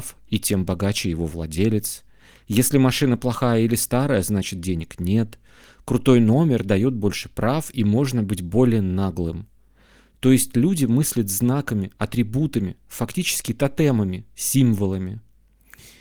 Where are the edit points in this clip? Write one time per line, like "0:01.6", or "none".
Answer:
none

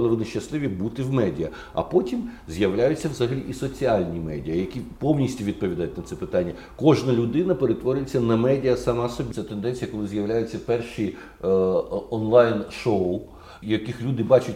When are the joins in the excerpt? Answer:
0:09.3
0:13.6

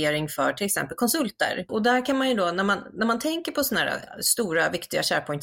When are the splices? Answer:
0:01.7

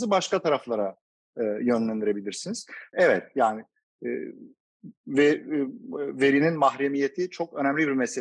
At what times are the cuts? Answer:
0:02.9

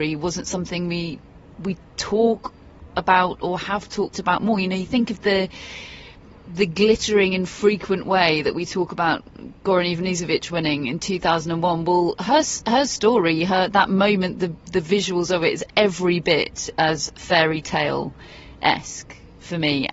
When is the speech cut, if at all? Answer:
none

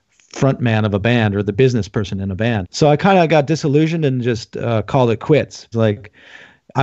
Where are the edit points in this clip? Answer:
0:02.6
0:05.7

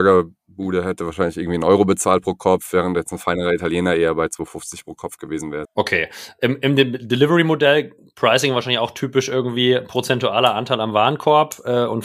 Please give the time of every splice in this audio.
0:05.6

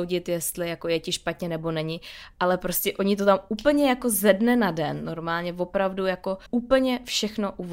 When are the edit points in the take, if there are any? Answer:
0:06.5

